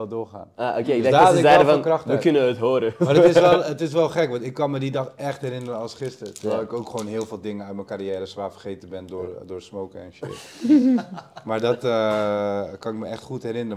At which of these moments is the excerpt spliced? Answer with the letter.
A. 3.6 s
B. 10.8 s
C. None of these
C